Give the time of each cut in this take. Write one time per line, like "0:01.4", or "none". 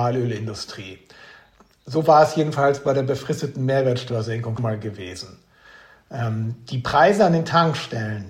0:04.6